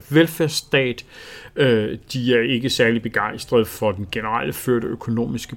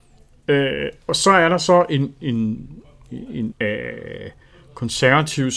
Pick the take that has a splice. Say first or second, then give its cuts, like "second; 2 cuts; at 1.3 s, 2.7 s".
second; 2 cuts; at 2.2 s, 3.5 s